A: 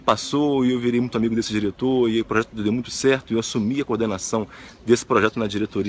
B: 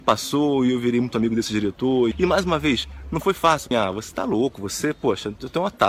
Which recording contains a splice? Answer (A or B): B